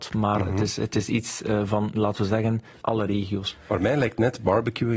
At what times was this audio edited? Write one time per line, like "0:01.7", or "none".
0:02.8